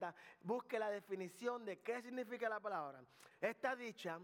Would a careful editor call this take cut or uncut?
cut